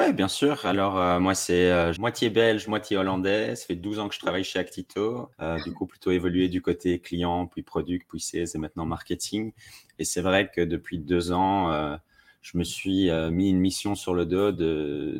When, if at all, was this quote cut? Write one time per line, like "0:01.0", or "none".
0:02.0
0:05.3